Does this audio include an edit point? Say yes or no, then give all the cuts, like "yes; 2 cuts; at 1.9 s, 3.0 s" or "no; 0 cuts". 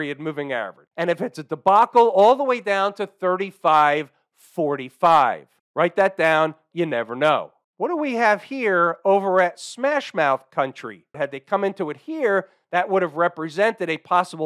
yes; 3 cuts; at 0.9 s, 6.7 s, 11.1 s